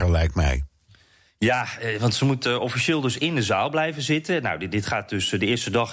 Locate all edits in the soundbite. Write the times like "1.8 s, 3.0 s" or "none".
none